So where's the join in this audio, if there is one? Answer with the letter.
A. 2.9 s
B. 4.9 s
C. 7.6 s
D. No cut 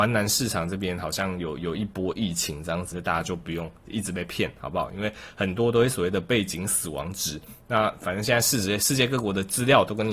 A